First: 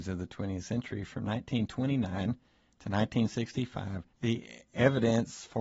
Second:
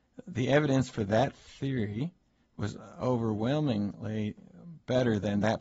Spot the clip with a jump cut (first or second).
first